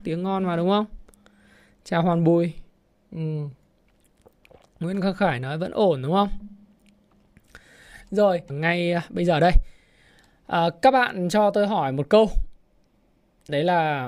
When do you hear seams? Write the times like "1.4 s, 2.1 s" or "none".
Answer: 8.5 s